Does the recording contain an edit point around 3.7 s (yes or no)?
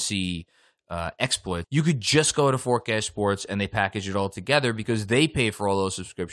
no